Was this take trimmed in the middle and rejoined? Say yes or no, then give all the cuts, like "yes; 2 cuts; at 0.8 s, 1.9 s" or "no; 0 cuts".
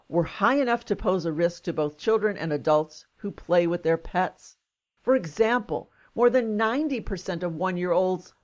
yes; 1 cut; at 5.0 s